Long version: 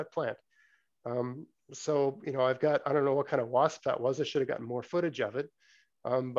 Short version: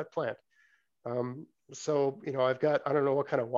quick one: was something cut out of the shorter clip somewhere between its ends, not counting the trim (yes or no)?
no